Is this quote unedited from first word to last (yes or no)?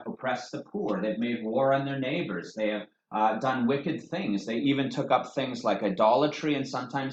yes